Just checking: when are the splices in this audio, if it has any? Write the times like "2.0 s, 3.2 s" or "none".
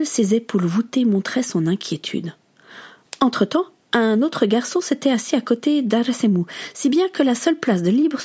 none